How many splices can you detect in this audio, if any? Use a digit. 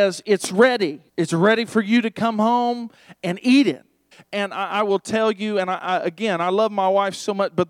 2